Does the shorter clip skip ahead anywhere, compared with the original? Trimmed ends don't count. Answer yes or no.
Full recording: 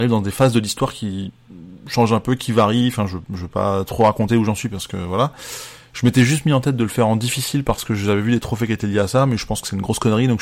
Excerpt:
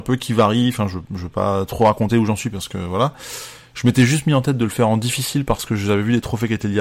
no